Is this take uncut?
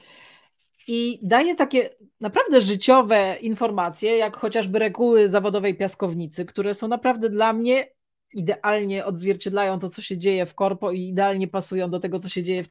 yes; 0 cuts

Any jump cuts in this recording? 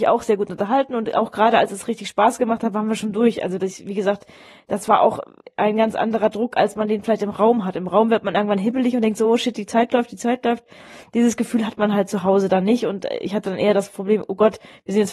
no; 0 cuts

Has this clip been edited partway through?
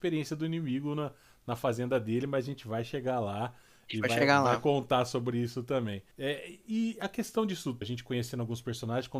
yes; 2 cuts; at 6.1 s, 7.8 s

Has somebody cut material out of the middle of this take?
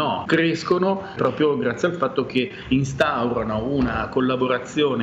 no; 0 cuts

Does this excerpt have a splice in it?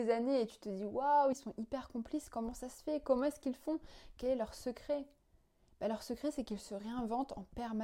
yes; 1 cut; at 1.3 s

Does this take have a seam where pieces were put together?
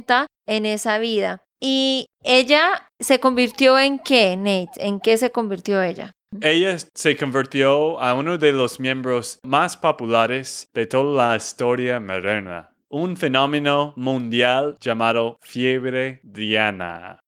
yes; 2 cuts; at 1.5 s, 12.8 s

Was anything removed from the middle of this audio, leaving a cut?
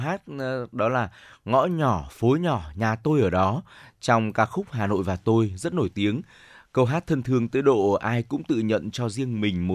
no; 0 cuts

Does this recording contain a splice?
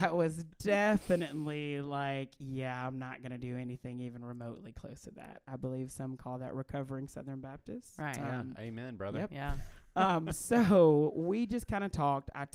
no; 0 cuts

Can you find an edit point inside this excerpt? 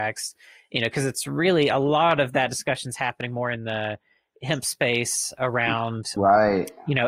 yes; 1 cut; at 6.2 s

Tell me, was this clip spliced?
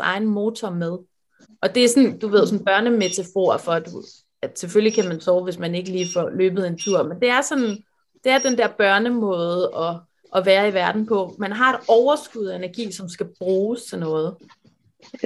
yes; 1 cut; at 1.4 s

